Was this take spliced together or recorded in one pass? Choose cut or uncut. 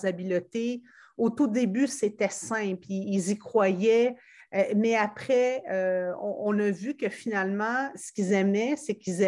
uncut